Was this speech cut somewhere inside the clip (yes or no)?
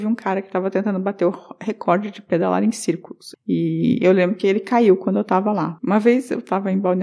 yes